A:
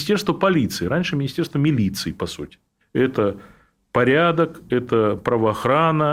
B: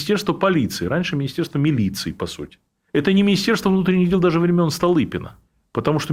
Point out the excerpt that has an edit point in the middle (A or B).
A